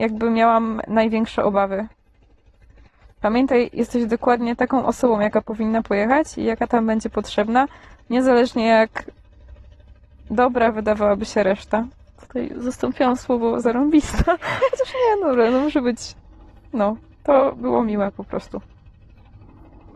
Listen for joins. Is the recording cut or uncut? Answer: uncut